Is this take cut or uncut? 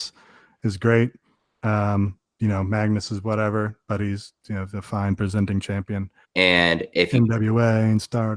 cut